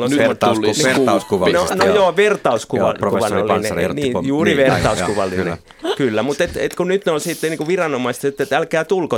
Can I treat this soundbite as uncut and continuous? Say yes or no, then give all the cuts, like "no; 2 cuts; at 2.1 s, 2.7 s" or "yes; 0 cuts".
yes; 0 cuts